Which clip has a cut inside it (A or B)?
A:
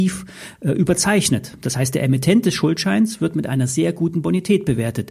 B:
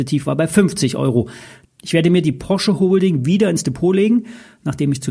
B